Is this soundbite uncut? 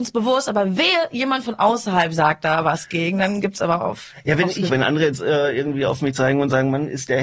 no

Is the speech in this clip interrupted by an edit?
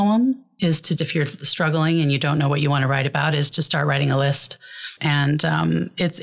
yes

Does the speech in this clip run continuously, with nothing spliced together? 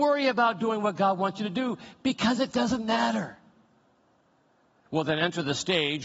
no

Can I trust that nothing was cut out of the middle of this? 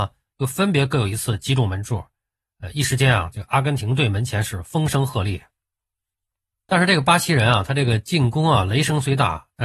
yes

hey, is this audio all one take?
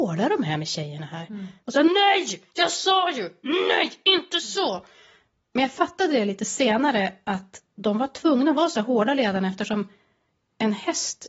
yes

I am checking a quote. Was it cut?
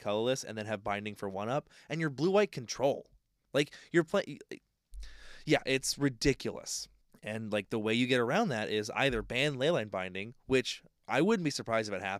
no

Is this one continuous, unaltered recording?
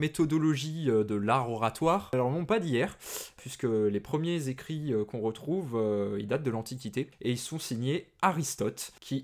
yes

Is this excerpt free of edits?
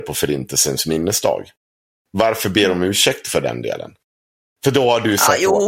no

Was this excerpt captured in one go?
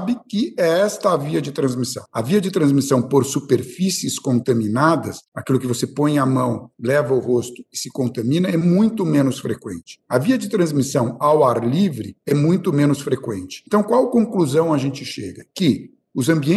yes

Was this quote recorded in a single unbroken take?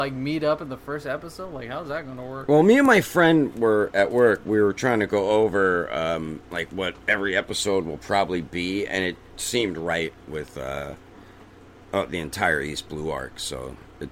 yes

